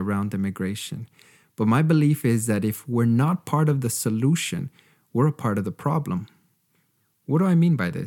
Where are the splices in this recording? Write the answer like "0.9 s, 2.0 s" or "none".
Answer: none